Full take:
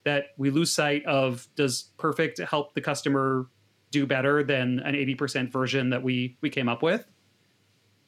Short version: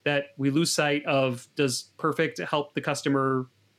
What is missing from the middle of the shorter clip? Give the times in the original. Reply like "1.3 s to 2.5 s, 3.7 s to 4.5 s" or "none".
none